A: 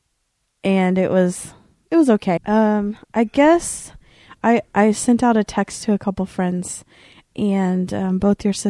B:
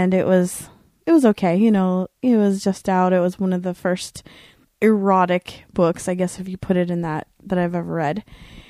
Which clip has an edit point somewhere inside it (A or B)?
A